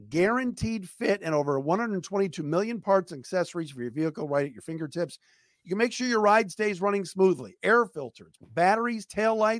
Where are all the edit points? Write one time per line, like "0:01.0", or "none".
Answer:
0:08.4